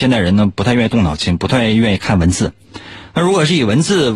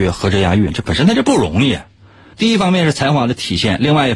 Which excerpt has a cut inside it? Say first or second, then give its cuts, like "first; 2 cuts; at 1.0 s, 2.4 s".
second; 1 cut; at 2.3 s